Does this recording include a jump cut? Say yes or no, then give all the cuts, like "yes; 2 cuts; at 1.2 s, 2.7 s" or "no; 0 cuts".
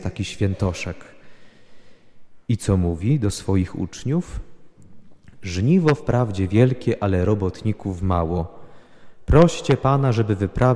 no; 0 cuts